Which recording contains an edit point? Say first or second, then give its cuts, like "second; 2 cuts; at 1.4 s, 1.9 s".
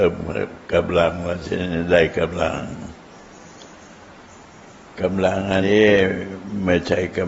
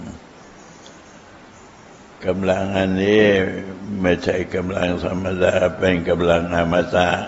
first; 1 cut; at 5.6 s